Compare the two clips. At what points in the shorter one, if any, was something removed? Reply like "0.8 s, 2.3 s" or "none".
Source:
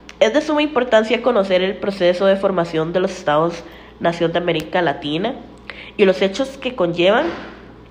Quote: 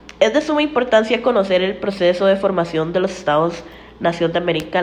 none